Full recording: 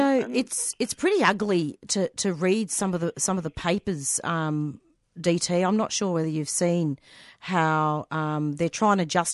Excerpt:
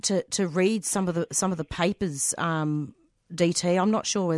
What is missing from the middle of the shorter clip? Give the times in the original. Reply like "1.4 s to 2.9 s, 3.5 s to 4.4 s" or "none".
none